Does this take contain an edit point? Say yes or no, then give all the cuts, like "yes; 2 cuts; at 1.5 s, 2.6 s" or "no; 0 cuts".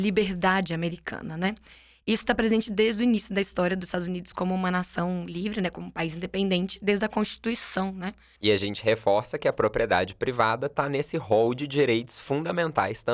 yes; 1 cut; at 8.4 s